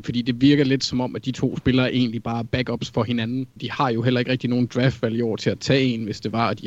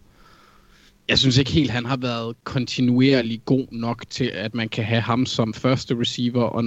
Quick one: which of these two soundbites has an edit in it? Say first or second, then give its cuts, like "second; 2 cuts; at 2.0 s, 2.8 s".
first; 1 cut; at 3.6 s